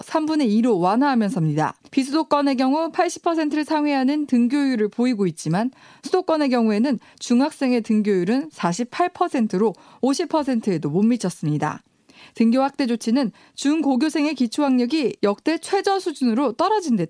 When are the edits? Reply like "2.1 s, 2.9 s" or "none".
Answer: 1.9 s